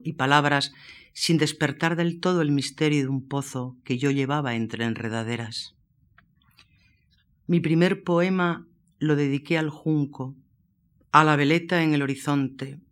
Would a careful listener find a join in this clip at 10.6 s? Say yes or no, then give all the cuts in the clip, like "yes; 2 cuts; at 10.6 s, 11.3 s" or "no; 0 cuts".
no; 0 cuts